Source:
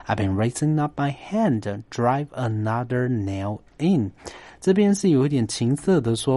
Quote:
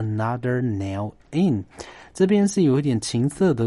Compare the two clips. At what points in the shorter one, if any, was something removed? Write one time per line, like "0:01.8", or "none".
none